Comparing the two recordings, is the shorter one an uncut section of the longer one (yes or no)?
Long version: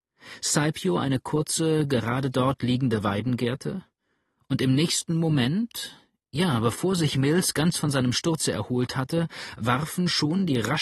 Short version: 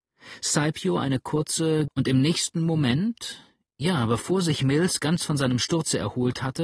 no